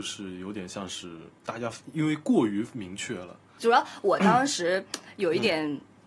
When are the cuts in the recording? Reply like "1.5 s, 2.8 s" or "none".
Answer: 3.6 s